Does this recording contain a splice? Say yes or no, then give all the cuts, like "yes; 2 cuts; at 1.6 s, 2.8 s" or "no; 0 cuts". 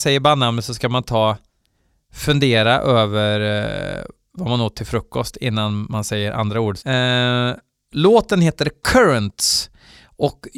yes; 1 cut; at 6.8 s